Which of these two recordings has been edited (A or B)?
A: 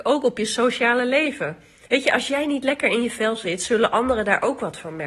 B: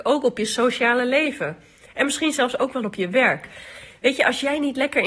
A